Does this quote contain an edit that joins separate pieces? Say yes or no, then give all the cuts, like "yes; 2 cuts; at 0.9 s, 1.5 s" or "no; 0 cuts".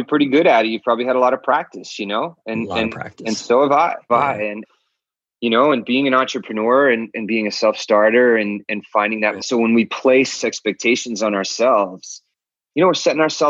yes; 2 cuts; at 4.1 s, 9.4 s